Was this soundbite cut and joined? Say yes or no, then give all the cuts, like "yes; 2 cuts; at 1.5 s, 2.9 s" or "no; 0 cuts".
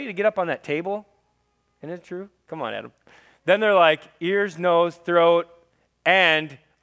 no; 0 cuts